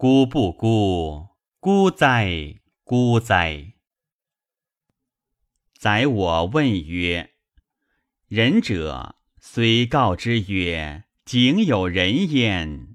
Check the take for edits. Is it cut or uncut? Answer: uncut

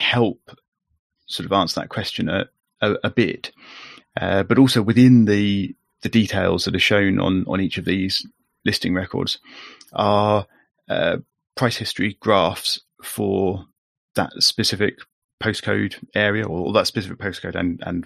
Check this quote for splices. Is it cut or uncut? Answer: uncut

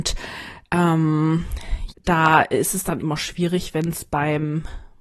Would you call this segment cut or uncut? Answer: cut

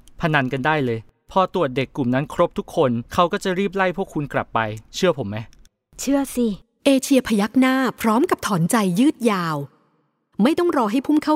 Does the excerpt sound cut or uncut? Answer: cut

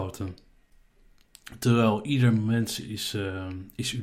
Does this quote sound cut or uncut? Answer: cut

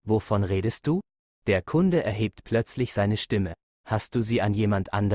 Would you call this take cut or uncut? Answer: cut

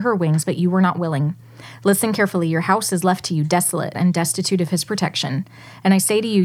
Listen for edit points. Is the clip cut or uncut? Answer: cut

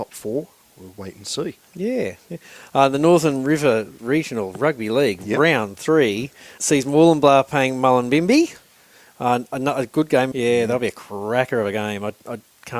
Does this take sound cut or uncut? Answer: cut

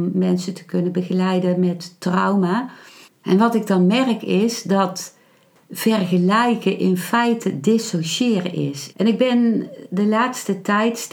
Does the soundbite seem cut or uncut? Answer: cut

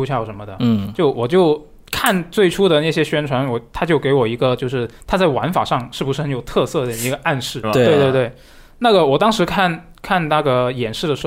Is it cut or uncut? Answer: cut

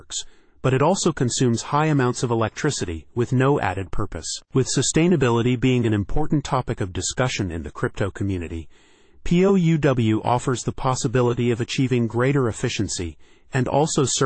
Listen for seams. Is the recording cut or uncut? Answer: uncut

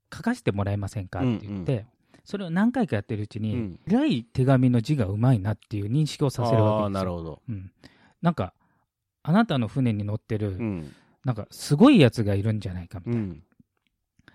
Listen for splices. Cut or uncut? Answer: cut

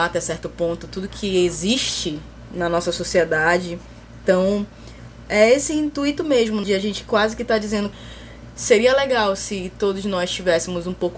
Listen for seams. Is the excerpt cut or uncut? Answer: uncut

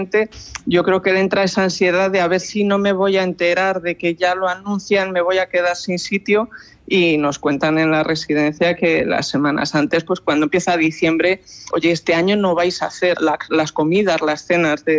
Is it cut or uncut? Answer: cut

